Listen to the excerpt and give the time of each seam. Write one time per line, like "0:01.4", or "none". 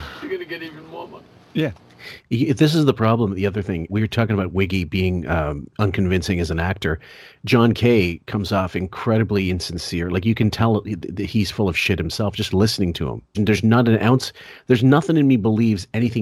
0:03.9
0:13.3